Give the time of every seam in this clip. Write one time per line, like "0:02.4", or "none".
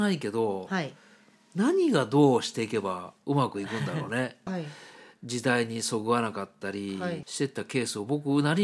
0:04.5
0:07.2